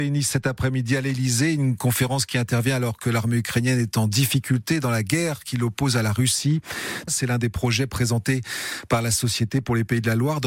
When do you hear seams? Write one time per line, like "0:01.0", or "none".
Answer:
0:07.1